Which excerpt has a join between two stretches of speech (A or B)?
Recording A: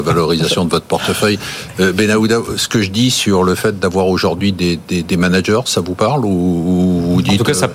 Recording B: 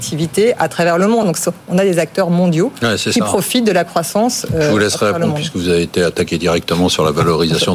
B